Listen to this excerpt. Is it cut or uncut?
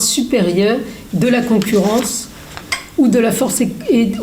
cut